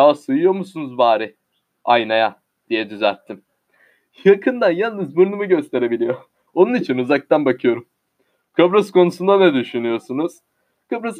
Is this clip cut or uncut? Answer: uncut